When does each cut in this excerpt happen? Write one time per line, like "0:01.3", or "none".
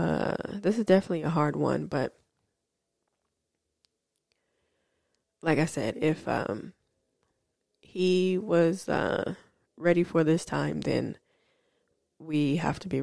none